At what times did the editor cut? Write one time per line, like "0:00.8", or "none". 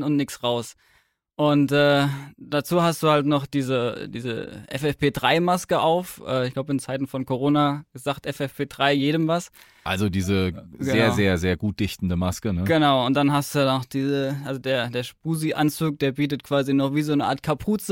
none